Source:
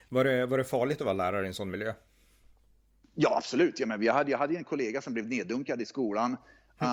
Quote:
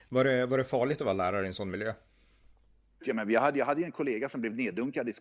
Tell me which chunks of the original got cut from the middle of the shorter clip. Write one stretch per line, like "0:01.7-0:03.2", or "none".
0:03.0-0:03.7

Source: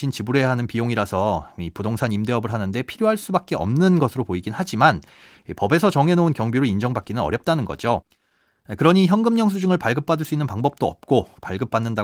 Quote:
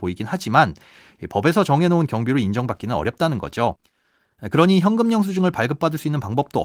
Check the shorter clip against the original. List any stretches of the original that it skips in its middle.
none

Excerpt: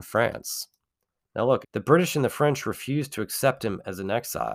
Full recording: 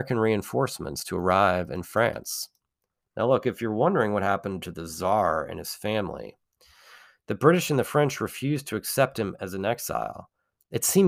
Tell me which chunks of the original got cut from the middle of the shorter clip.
0:03.4-0:07.2

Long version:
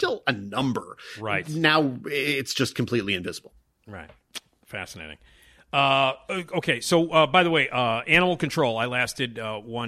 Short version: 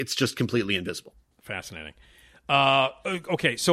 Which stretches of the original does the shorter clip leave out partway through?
0:03.7-0:04.6

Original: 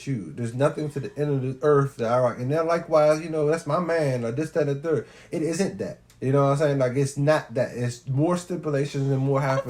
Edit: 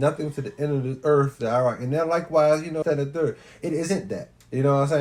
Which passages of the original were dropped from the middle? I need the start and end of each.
0:03.4-0:04.5

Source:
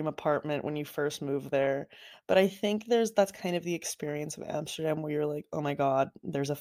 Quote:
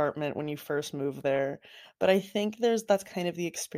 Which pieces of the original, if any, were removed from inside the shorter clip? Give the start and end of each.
none

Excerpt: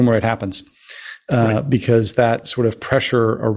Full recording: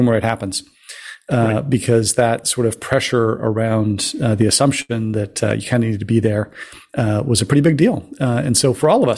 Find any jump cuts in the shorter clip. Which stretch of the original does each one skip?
none

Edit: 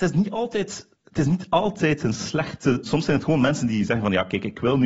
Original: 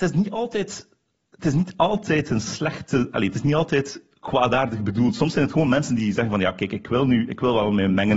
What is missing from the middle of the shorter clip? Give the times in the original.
0:00.9-0:01.2
0:03.1-0:05.1

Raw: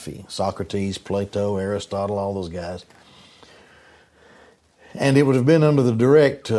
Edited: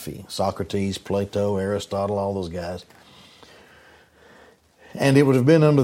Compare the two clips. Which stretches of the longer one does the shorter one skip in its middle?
none

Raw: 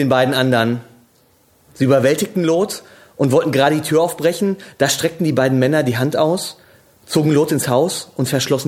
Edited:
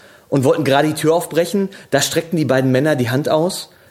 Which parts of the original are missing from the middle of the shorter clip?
none

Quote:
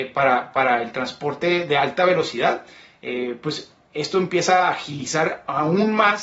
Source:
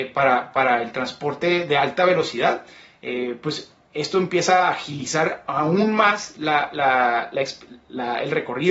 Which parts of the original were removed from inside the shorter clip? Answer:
none

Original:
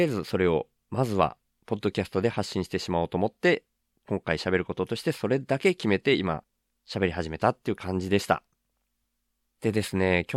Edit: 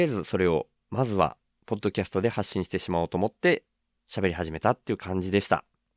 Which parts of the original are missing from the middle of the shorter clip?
0:04.0-0:06.8

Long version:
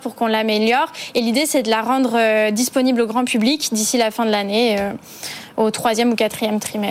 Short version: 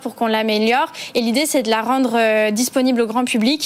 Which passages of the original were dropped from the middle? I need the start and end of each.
none

